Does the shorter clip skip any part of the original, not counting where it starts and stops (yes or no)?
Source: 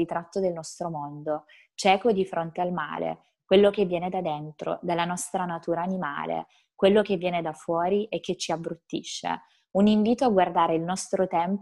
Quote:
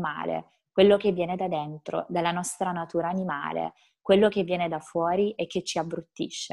no